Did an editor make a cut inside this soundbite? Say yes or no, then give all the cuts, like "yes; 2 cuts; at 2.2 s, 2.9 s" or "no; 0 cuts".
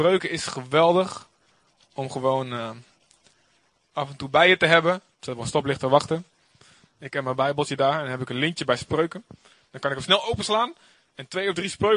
yes; 1 cut; at 5.1 s